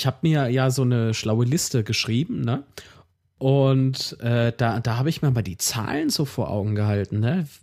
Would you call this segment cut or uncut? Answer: uncut